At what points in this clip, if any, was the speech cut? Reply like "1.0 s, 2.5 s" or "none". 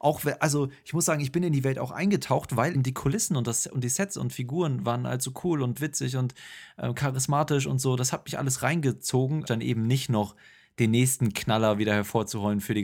2.7 s, 9.5 s